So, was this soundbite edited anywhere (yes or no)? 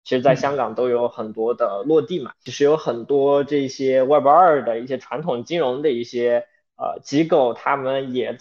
no